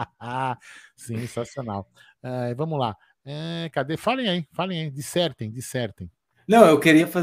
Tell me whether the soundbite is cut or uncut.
uncut